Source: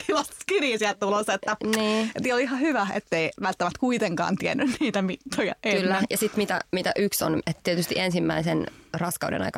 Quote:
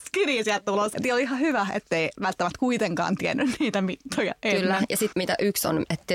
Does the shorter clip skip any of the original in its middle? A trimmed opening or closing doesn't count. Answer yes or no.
yes